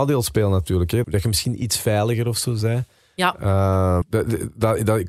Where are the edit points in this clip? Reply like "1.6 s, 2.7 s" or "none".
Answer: 1.0 s, 4.0 s